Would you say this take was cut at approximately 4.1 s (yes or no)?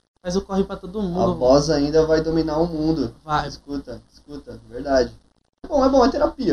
no